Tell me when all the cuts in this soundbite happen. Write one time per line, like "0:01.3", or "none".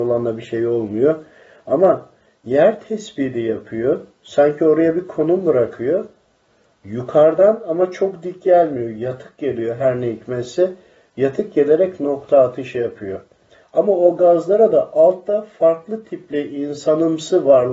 0:13.6